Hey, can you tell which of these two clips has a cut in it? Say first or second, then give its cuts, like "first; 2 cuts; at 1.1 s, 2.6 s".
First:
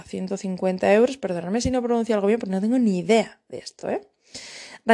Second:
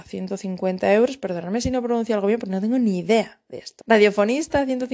second; 1 cut; at 3.8 s